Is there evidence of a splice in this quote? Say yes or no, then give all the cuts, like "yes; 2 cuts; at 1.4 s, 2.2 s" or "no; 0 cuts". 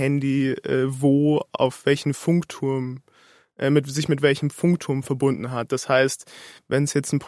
no; 0 cuts